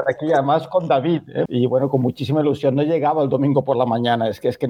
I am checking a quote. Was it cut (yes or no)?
yes